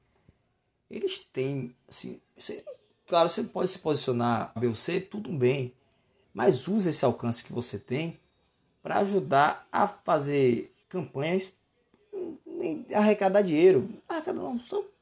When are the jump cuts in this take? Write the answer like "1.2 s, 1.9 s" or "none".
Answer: 4.6 s, 6.2 s, 10.8 s